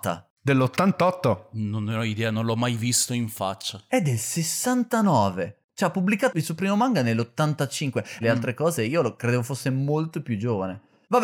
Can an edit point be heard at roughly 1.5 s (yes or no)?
no